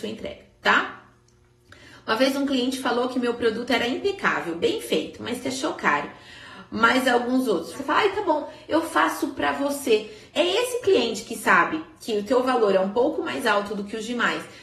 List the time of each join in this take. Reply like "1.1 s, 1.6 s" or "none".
7.7 s, 10.3 s